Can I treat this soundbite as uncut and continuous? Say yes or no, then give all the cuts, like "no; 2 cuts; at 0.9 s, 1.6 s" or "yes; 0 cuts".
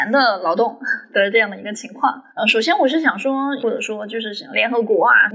no; 2 cuts; at 2.3 s, 3.6 s